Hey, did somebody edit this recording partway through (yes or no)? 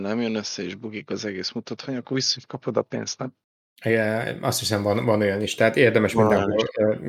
no